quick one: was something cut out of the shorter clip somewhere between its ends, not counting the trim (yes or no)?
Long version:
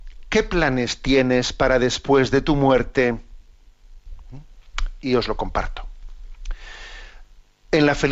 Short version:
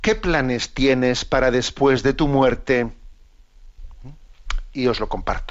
no